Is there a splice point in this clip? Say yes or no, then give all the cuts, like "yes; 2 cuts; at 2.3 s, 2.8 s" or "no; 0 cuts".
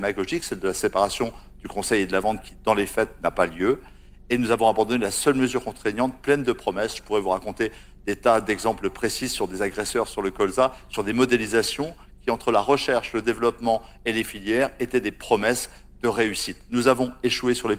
no; 0 cuts